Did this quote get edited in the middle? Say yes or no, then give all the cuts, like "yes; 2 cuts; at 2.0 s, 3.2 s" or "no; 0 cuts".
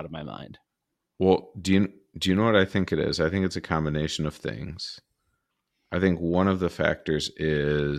no; 0 cuts